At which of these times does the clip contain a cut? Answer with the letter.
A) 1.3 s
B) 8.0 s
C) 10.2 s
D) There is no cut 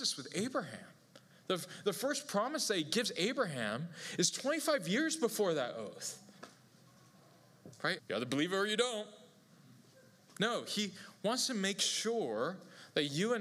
B